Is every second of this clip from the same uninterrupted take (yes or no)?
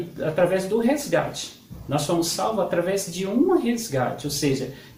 yes